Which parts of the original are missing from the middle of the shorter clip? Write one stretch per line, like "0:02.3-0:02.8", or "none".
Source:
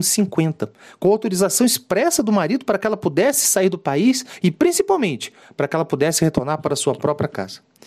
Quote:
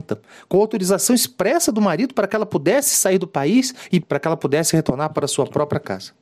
0:04.5-0:05.5